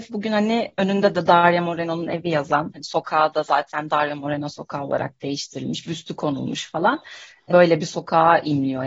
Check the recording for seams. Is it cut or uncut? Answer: cut